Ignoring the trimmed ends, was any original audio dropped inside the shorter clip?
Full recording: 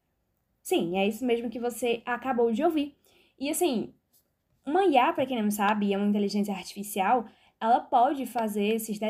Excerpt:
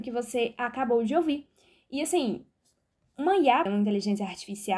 yes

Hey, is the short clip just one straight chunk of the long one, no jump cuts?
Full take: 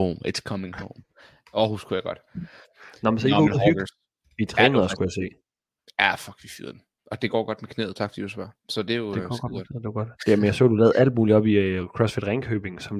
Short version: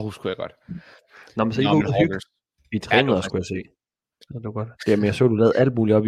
no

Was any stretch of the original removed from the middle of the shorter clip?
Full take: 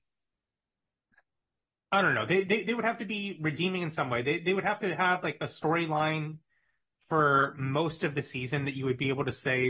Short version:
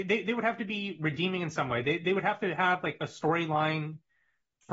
no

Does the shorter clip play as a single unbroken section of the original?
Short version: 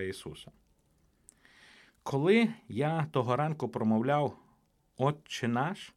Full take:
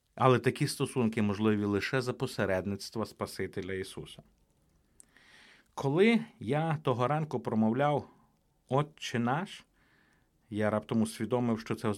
yes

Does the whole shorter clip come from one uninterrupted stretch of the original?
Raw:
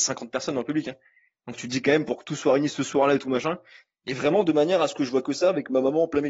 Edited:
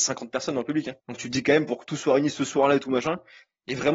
no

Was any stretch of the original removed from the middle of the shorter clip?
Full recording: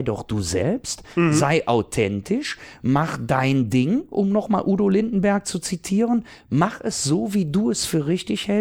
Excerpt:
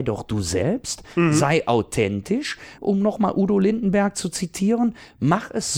yes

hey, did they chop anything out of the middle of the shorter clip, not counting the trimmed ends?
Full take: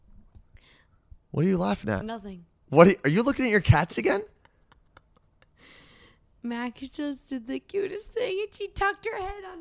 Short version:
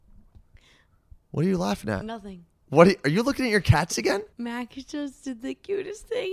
yes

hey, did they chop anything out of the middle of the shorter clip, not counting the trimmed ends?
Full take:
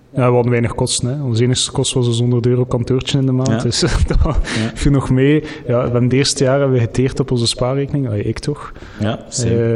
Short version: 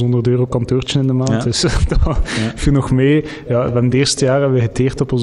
no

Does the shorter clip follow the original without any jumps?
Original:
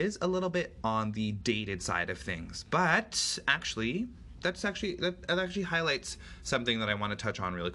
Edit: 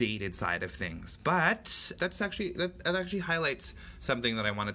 no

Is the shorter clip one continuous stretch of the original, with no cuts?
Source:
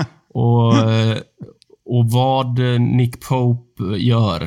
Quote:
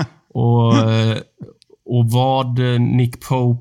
yes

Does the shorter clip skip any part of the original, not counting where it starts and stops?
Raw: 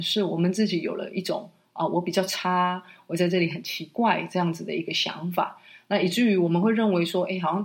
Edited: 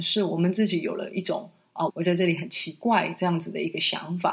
yes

